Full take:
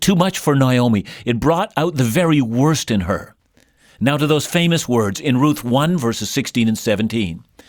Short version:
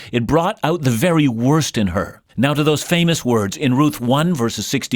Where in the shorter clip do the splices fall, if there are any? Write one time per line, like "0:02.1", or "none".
0:02.3